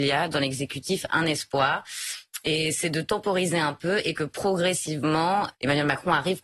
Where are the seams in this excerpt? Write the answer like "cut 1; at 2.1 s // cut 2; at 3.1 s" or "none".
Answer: cut 1; at 5.5 s